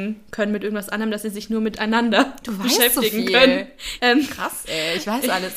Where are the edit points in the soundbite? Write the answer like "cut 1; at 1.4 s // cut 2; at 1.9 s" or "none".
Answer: cut 1; at 4.0 s